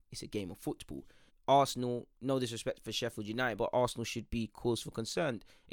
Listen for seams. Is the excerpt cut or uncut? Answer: cut